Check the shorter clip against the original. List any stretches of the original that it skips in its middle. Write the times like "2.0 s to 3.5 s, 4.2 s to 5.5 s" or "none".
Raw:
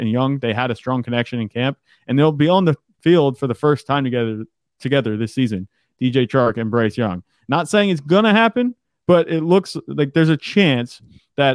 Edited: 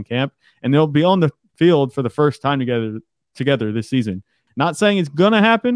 5.9 s to 7.4 s